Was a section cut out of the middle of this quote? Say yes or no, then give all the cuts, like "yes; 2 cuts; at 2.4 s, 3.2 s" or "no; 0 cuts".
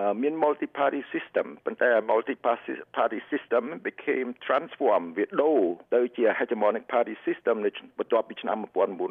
yes; 1 cut; at 5.8 s